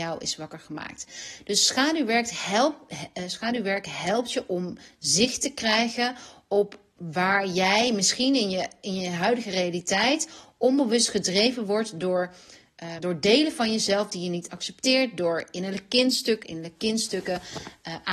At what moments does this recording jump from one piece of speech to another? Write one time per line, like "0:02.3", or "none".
0:13.0
0:16.4

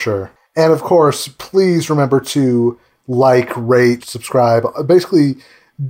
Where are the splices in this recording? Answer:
0:04.0

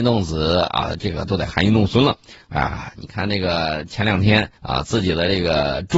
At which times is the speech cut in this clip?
0:03.0
0:04.6

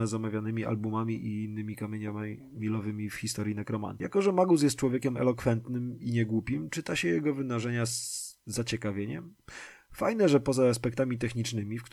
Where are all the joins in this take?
none

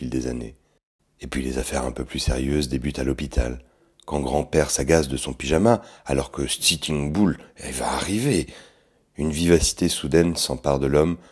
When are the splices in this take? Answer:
none

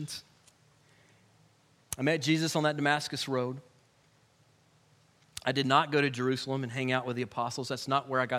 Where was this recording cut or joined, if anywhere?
none

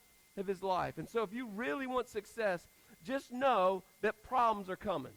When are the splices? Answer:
none

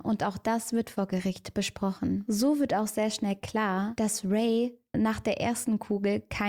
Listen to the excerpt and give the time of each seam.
0:04.9

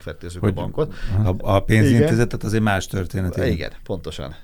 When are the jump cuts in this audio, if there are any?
0:01.2

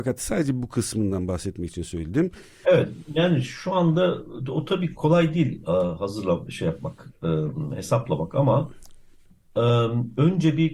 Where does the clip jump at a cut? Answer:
0:02.6

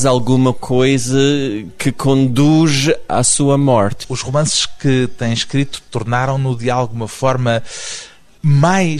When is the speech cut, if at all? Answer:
0:04.0

